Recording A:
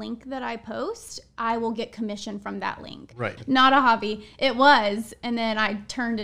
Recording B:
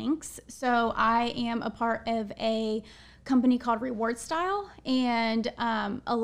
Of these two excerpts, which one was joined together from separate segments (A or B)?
A